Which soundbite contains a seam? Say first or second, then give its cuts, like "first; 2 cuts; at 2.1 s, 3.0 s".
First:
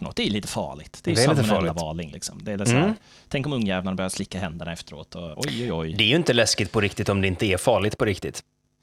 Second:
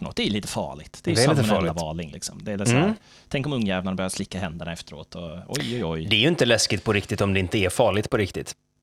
first; 1 cut; at 5.3 s